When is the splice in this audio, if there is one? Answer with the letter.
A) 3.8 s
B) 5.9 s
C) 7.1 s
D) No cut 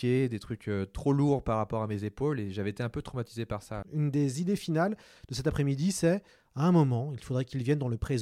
A